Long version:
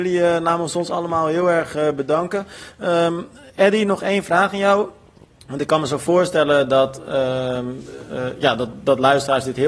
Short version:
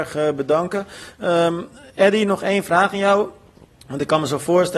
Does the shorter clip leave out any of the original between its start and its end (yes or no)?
no